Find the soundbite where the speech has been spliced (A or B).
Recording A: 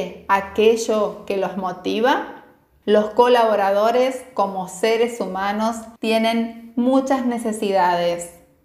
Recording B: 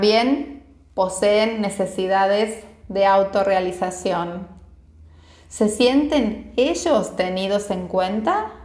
A